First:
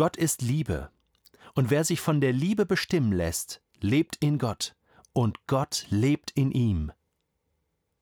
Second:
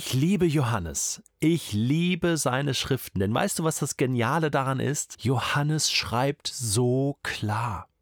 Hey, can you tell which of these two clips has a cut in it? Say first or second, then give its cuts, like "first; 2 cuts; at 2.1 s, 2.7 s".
second; 1 cut; at 5.1 s